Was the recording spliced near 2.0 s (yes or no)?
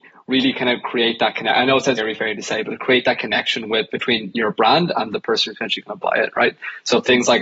yes